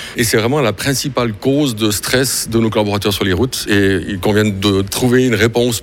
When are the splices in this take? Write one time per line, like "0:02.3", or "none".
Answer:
none